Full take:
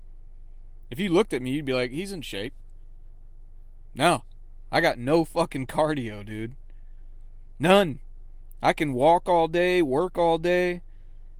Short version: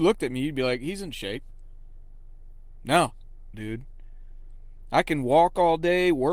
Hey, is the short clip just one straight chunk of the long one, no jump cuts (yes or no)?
no